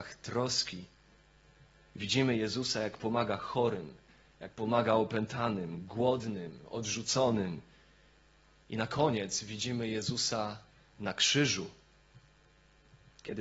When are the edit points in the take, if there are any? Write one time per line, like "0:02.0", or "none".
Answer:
none